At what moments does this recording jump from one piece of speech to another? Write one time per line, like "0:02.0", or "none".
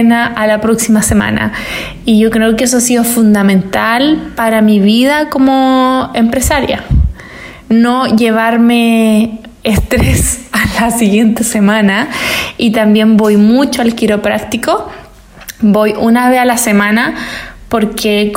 none